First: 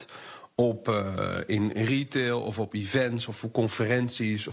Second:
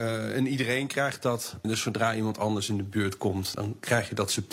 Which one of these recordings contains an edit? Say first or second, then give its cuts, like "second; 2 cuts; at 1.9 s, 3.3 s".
second; 2 cuts; at 1.6 s, 3.5 s